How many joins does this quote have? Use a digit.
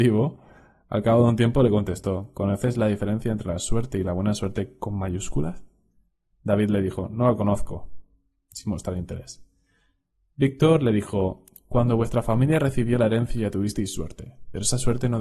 0